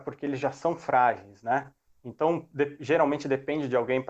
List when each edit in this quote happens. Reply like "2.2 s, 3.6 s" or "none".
none